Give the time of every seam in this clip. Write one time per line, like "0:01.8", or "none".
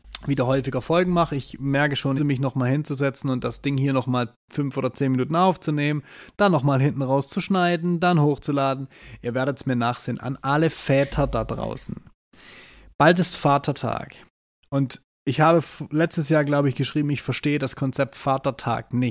0:02.2